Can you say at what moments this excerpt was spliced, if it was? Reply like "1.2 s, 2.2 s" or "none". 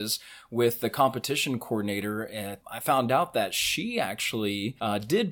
2.6 s